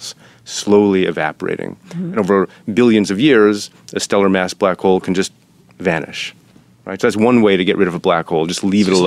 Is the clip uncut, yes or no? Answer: yes